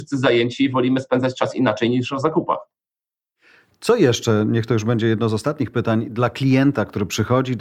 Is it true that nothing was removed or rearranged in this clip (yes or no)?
yes